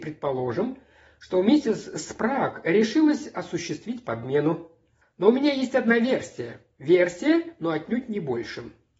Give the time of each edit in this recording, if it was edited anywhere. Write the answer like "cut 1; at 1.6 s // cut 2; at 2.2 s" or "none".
cut 1; at 5.0 s